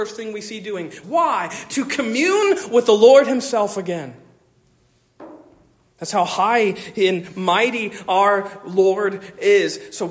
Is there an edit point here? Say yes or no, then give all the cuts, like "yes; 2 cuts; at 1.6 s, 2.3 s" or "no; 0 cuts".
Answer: yes; 2 cuts; at 1.0 s, 5.9 s